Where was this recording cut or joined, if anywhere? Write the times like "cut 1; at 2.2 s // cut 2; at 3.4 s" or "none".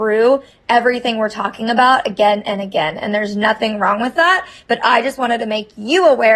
none